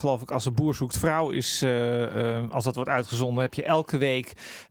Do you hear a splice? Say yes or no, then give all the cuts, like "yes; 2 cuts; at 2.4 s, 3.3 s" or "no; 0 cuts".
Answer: no; 0 cuts